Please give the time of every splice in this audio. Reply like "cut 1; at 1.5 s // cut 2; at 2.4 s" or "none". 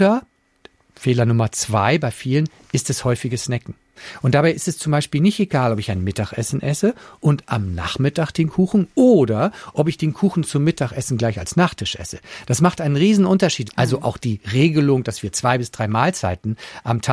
cut 1; at 13.7 s